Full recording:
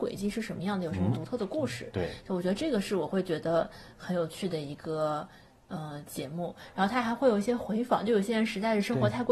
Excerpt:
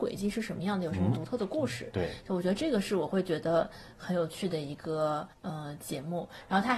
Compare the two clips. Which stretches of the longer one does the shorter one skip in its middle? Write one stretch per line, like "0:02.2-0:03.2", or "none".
0:05.3-0:05.6